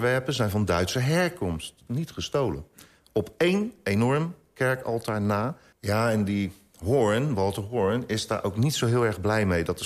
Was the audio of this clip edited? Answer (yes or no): yes